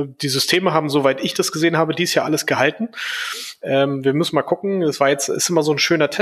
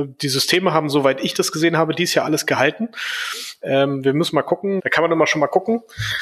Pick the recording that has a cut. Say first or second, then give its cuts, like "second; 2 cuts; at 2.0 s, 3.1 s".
second; 1 cut; at 4.8 s